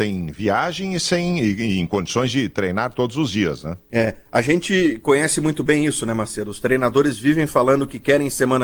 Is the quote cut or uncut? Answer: cut